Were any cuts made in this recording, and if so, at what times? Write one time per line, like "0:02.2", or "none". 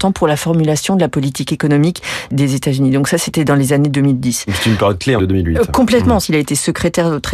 0:05.2
0:06.2